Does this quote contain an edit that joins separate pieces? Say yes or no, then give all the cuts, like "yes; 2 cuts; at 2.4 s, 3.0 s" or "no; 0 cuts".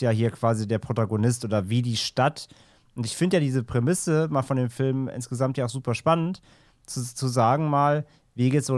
no; 0 cuts